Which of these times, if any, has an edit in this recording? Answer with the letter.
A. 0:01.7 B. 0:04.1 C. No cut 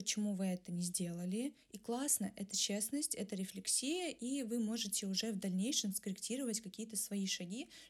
C